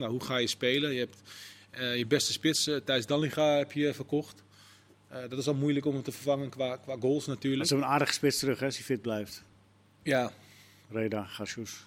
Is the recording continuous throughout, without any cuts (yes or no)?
yes